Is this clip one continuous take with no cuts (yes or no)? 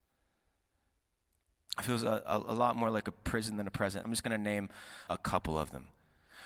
no